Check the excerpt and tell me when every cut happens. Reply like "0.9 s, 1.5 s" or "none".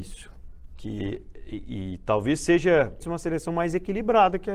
3.0 s

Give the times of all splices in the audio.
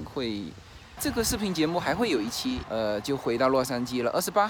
1.0 s, 2.6 s

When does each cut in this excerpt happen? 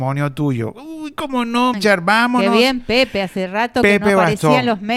1.7 s

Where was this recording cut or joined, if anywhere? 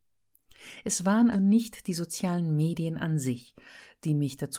1.3 s

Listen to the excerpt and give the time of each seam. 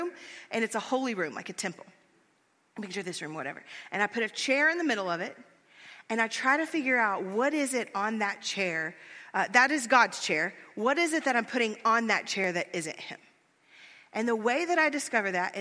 none

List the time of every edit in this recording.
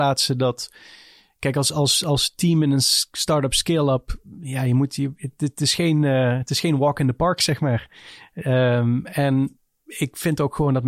none

